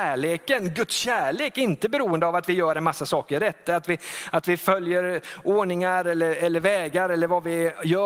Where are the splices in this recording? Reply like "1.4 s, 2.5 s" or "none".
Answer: none